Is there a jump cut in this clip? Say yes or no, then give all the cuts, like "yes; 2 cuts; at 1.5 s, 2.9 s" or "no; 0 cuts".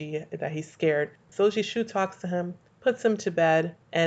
no; 0 cuts